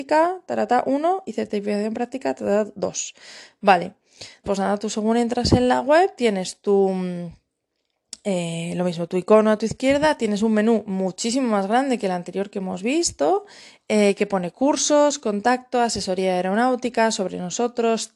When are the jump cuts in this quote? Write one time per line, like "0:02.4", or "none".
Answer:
0:04.4